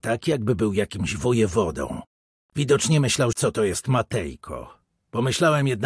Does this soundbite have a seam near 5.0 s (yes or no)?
no